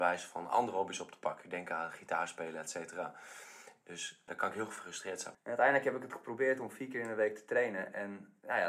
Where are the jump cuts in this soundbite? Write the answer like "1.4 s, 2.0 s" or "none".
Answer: 4.3 s, 5.3 s